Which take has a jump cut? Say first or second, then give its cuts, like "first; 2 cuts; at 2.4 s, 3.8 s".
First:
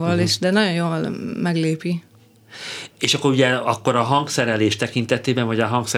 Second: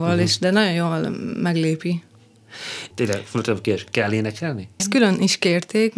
second; 2 cuts; at 2.9 s, 4.8 s